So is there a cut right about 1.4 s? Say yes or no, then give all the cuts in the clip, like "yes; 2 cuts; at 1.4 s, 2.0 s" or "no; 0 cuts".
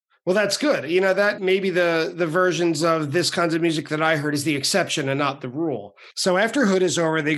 yes; 2 cuts; at 1.4 s, 6.1 s